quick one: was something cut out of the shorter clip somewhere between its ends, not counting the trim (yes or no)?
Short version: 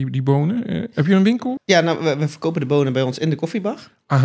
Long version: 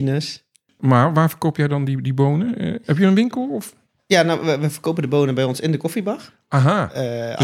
yes